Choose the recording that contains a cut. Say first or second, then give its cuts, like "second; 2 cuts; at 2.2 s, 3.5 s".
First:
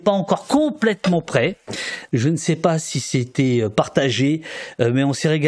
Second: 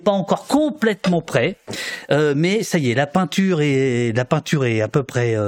first; 1 cut; at 2.1 s